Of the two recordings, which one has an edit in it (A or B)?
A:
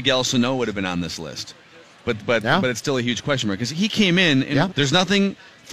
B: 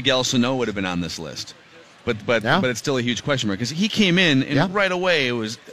A